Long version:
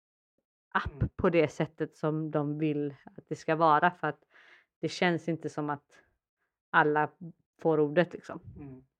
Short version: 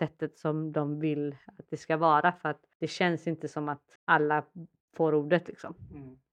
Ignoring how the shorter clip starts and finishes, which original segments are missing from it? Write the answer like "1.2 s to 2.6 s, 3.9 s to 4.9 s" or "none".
4.3 s to 4.7 s, 6.0 s to 6.6 s